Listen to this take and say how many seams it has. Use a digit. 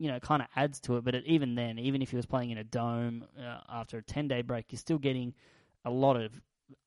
0